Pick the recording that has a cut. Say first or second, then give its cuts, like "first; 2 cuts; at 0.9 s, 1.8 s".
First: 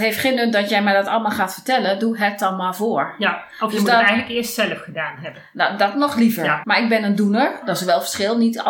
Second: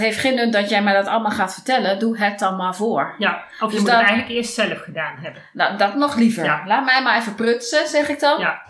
first; 1 cut; at 6.6 s